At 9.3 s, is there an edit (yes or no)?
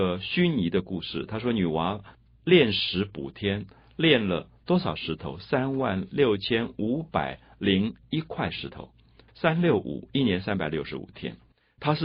yes